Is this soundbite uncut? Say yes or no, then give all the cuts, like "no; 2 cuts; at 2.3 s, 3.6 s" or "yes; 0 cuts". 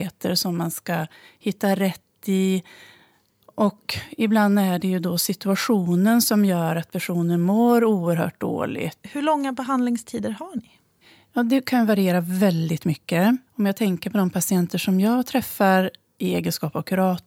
no; 3 cuts; at 3.4 s, 9.0 s, 13.5 s